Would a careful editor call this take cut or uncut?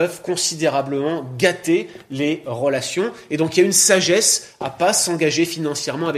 uncut